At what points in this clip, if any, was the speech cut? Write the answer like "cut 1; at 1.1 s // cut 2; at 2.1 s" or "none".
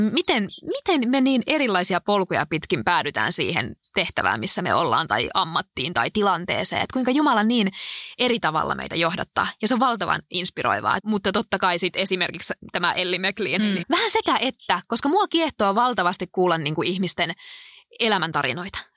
cut 1; at 11.0 s // cut 2; at 13.8 s